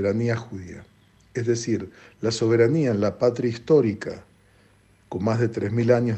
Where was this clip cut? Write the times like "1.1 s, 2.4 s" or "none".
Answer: none

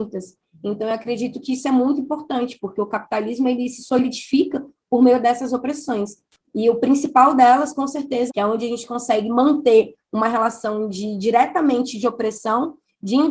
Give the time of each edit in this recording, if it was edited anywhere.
8.3 s

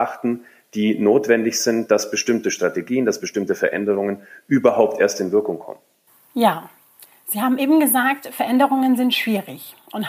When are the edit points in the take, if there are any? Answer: none

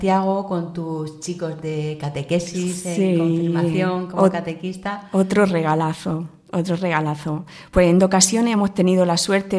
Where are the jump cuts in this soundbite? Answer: none

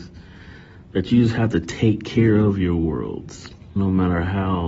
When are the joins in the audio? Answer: 3.8 s

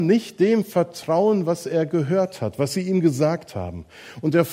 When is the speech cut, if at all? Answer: none

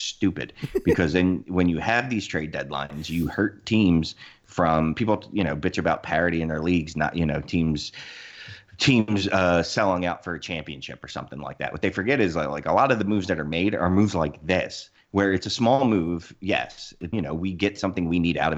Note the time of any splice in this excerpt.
17.1 s

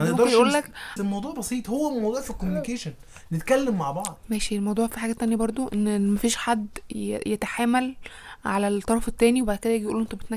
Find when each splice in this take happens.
1.0 s

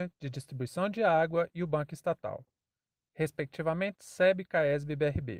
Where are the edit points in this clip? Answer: none

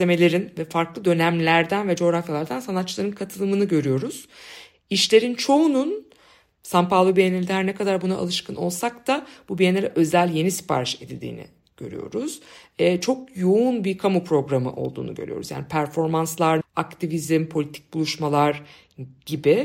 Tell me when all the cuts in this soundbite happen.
16.6 s

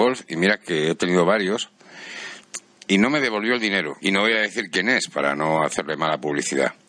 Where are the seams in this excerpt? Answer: 2.9 s, 4.0 s

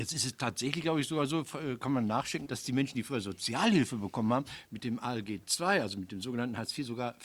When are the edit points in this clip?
2.4 s

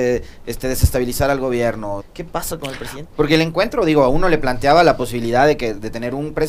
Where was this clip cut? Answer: 2.0 s, 3.0 s

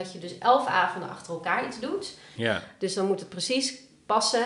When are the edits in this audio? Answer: 2.4 s

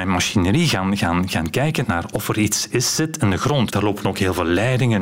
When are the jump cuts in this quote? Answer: 1.8 s, 3.7 s

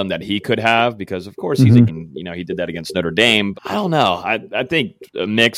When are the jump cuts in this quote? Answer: 1.9 s, 3.5 s

